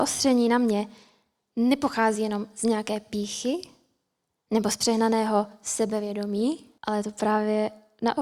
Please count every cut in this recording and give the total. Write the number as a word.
one